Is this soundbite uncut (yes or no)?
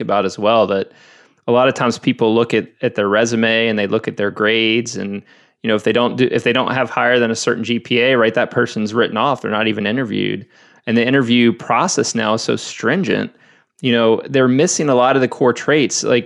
yes